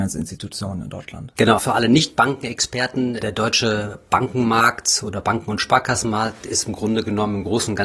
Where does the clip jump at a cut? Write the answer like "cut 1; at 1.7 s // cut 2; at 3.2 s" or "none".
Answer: cut 1; at 1.6 s // cut 2; at 3.2 s